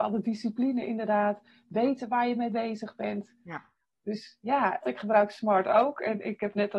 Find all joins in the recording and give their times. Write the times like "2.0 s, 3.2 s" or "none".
4.8 s